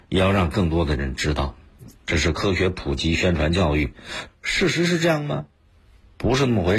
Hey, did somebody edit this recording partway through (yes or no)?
yes